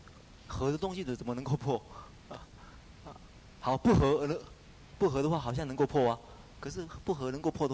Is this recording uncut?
yes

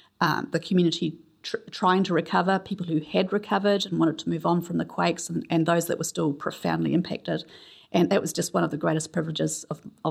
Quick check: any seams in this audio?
no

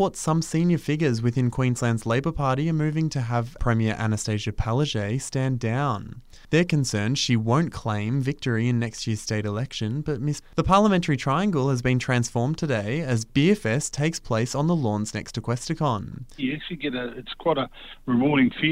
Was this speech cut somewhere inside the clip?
yes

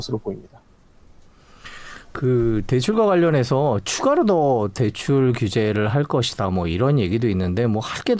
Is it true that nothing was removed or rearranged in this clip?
yes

